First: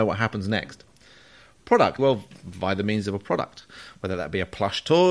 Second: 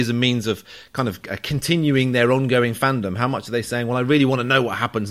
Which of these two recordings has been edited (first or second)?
first